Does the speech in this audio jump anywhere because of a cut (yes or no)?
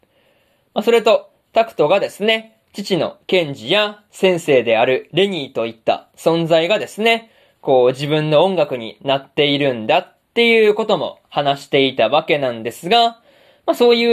no